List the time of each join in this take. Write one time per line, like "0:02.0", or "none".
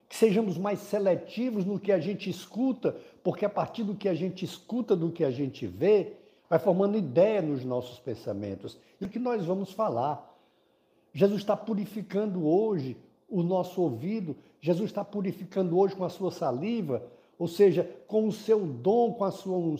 0:06.4
0:09.0